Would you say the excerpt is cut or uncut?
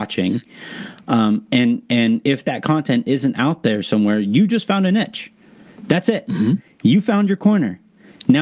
uncut